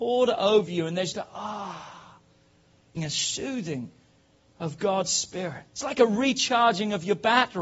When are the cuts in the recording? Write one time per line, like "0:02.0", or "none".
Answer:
0:01.1
0:03.0
0:05.7

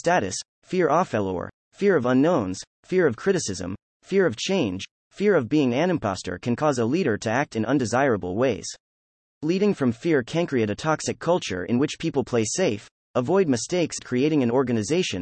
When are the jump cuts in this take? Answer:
0:14.0

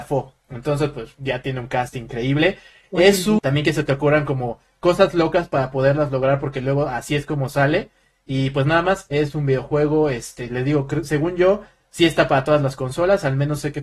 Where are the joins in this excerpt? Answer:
0:03.4

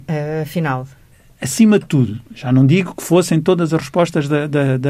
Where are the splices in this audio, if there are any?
none

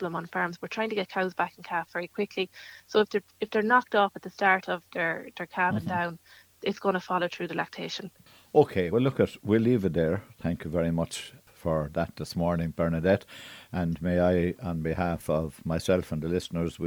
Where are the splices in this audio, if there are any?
0:08.9

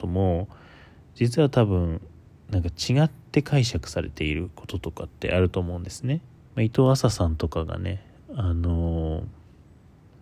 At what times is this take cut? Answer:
0:06.4

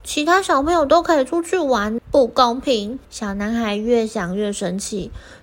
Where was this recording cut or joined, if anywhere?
0:02.0
0:03.0

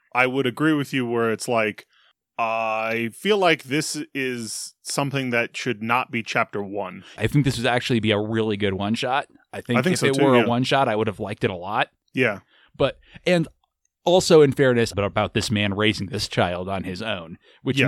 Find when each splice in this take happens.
0:07.2
0:14.9

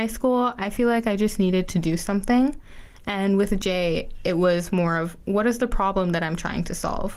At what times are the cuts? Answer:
none

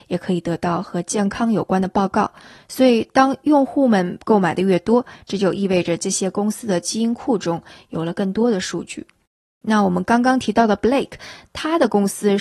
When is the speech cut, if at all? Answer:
0:09.6

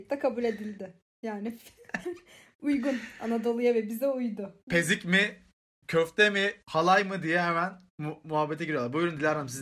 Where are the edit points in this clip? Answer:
0:02.0
0:04.6

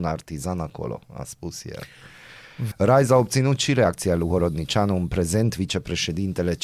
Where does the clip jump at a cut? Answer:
0:02.7

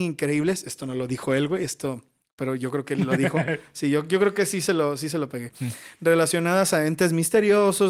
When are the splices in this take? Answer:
none

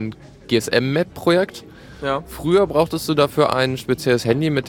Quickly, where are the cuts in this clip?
none

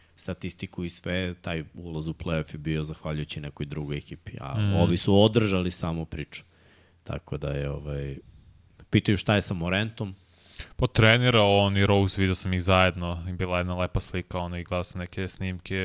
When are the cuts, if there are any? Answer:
none

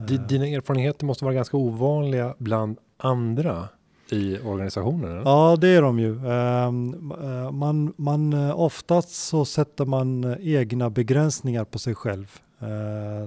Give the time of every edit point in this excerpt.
none

